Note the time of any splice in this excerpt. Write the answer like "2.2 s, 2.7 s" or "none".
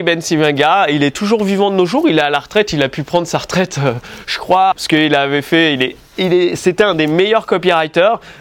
4.7 s